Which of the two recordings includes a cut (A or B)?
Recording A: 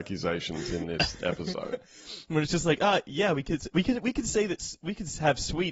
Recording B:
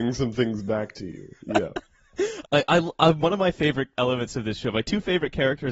B